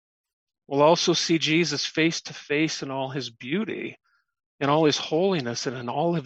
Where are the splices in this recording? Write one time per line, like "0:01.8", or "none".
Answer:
none